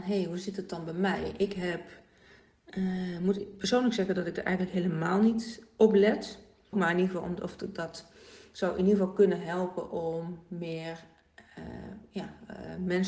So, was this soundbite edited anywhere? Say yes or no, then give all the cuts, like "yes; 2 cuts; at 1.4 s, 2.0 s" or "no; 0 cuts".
yes; 1 cut; at 6.7 s